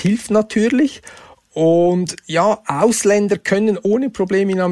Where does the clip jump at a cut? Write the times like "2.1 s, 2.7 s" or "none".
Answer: none